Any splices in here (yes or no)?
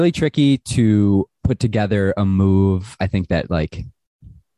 no